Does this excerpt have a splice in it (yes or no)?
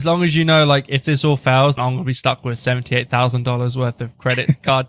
yes